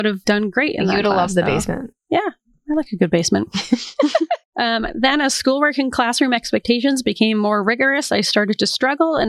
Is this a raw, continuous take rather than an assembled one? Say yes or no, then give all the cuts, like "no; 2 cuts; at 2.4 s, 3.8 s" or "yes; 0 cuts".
yes; 0 cuts